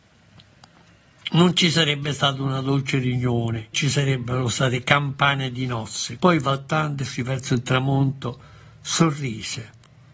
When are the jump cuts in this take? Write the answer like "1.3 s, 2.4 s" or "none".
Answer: 3.7 s, 6.2 s